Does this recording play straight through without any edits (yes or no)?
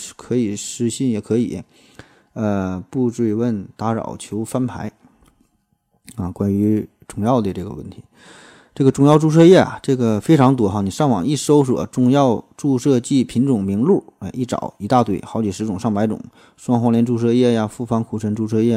yes